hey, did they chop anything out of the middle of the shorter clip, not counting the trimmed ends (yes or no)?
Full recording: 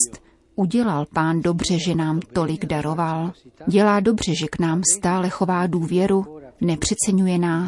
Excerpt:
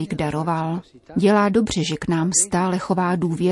no